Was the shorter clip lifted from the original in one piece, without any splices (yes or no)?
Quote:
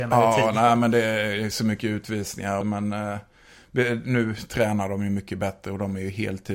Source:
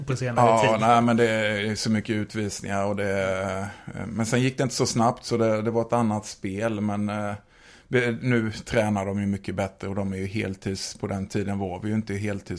no